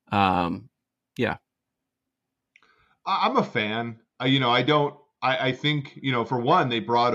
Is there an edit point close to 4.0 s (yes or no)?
no